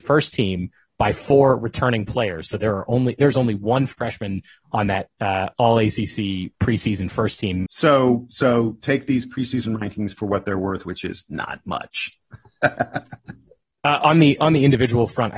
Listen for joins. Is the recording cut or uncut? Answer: cut